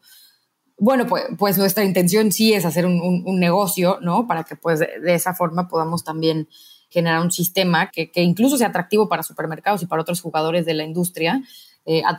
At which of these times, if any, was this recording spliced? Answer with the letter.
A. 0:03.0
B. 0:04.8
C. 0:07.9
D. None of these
C